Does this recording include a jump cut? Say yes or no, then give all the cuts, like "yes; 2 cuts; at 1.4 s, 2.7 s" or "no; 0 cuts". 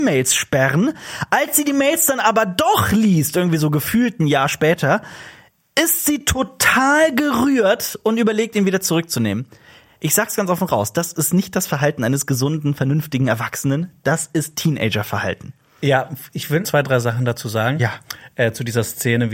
yes; 1 cut; at 16.6 s